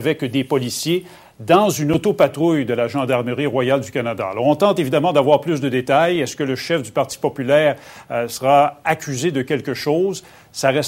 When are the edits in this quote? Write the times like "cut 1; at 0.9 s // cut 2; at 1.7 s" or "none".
none

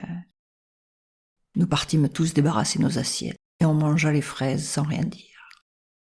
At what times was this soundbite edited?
cut 1; at 1.4 s // cut 2; at 3.5 s

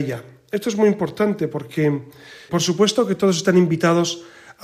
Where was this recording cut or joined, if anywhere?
cut 1; at 2.5 s

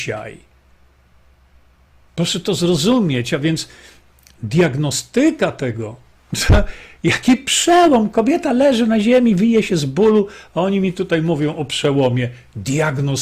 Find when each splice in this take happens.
none

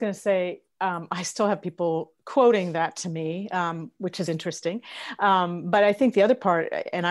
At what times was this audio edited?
cut 1; at 4.3 s

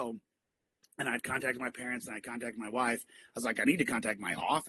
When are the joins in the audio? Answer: none

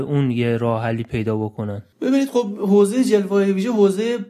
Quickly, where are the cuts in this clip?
cut 1; at 1.9 s

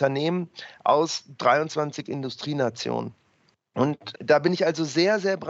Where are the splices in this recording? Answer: cut 1; at 4.1 s

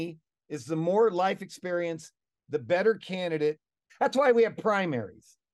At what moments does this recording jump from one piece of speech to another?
cut 1; at 3.9 s

